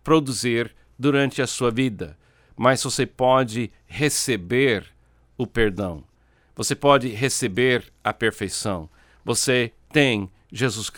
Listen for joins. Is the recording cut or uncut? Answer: uncut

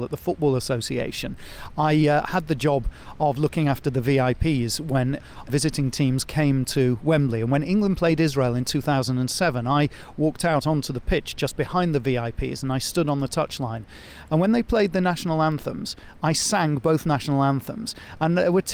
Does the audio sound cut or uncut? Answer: uncut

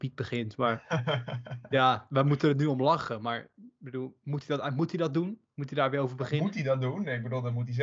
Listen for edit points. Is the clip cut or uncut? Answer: uncut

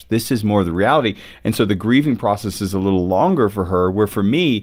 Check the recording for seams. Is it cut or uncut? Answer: uncut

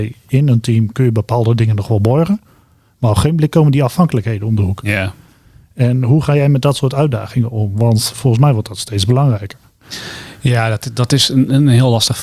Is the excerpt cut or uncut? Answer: uncut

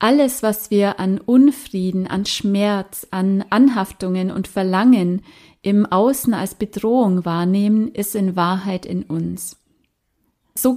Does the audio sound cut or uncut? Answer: uncut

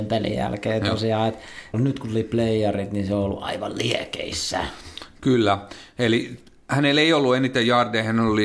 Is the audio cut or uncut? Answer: cut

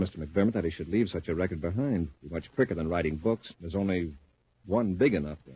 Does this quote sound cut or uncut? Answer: cut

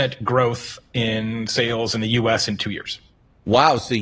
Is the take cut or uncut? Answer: uncut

